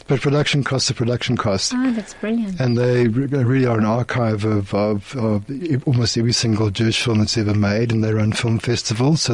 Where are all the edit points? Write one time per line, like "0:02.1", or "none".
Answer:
0:01.7